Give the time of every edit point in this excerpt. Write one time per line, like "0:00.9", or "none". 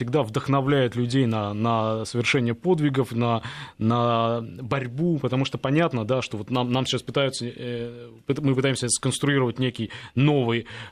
none